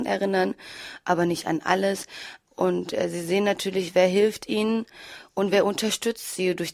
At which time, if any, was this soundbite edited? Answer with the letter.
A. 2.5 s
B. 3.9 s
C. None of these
A